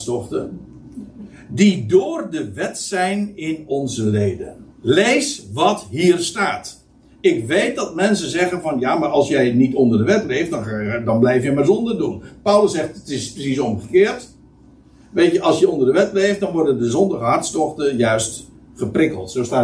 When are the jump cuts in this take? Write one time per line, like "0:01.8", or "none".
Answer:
0:04.7